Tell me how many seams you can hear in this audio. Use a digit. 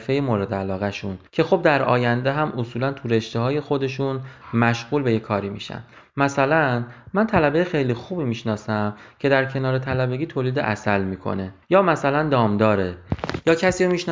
2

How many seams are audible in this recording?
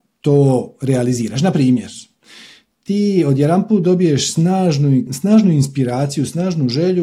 1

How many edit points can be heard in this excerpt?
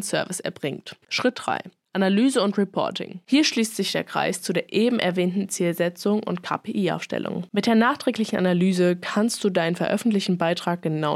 1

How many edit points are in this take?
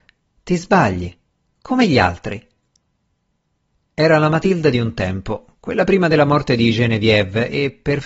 0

